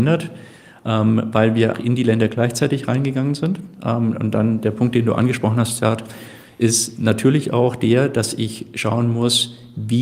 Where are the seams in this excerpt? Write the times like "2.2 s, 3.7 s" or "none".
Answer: 1.7 s